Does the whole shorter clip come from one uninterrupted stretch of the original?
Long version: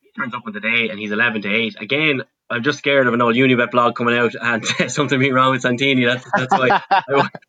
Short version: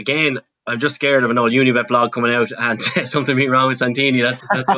yes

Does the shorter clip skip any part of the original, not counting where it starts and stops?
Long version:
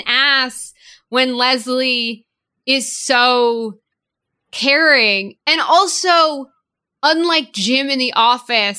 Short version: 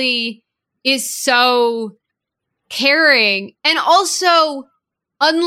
no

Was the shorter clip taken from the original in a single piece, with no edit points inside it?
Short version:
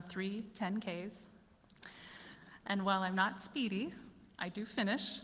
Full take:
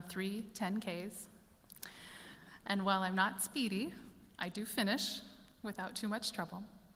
yes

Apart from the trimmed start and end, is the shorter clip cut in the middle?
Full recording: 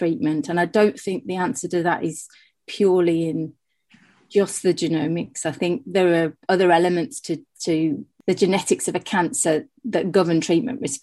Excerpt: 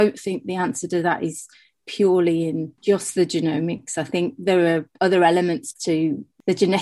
yes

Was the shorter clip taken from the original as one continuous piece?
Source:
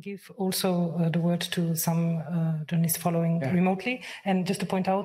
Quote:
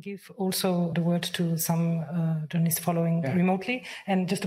no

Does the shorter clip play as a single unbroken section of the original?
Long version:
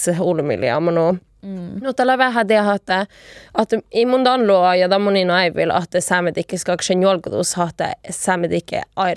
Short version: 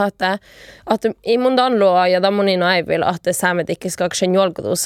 yes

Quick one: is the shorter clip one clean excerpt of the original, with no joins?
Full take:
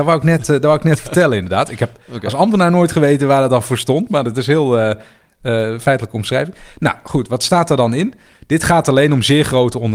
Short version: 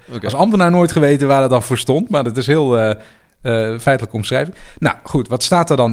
yes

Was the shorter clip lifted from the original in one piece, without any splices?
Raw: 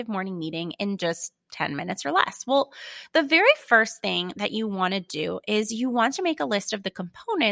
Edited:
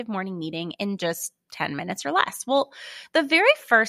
yes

